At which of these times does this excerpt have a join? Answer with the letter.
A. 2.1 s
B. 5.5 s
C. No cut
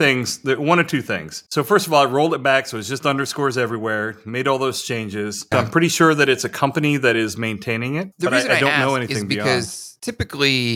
B